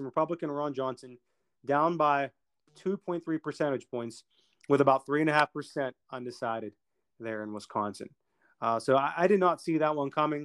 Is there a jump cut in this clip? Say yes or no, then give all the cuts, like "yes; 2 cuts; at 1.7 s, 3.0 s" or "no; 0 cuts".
no; 0 cuts